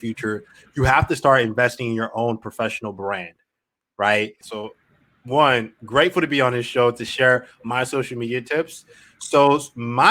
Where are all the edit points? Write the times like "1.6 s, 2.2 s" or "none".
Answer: 4.4 s